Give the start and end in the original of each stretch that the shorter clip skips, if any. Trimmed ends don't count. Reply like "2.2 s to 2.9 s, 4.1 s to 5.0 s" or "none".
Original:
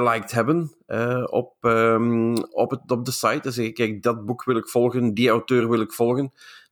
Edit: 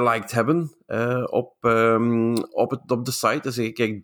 none